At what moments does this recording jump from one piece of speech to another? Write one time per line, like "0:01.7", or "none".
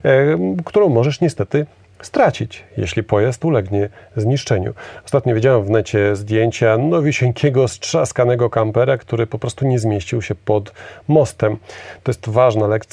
none